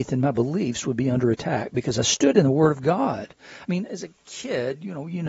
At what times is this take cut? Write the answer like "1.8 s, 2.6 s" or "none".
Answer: none